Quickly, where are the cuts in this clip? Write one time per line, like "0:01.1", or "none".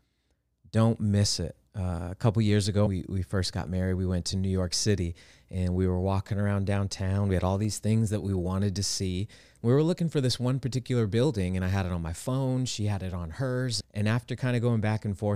0:02.9
0:13.8